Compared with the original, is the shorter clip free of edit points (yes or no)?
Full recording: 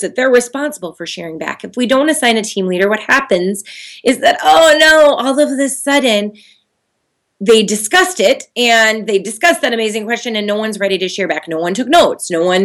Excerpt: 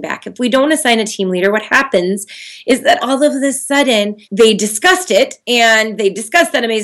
no